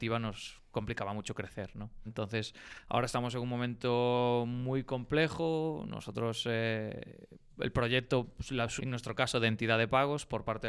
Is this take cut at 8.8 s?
yes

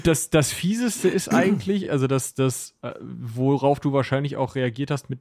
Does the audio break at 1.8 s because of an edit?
no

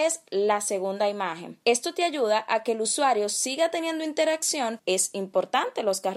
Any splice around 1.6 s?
yes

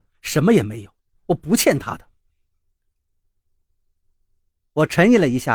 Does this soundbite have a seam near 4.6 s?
yes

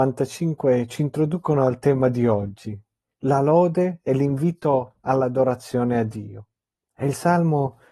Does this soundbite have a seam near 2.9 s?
no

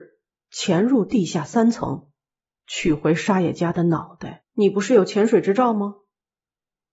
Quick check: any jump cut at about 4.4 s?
yes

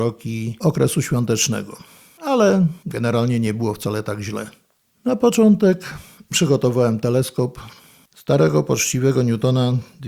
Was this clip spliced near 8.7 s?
no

